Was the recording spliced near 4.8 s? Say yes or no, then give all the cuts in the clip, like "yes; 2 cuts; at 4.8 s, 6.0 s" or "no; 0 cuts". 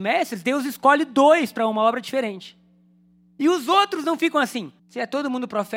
yes; 1 cut; at 4.8 s